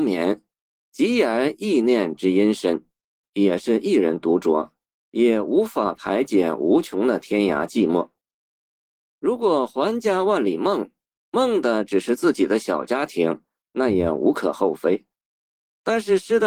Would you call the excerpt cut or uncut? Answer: cut